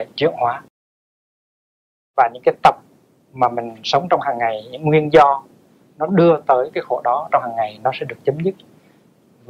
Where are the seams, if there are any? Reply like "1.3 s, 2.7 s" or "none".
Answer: none